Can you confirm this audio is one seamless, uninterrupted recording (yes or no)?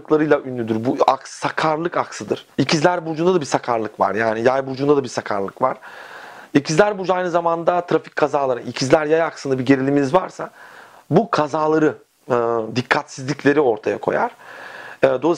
yes